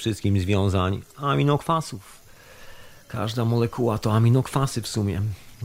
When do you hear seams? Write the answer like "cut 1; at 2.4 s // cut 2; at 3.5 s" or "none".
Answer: none